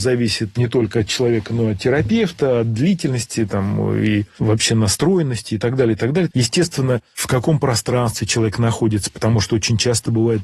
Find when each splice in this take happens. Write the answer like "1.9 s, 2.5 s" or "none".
6.3 s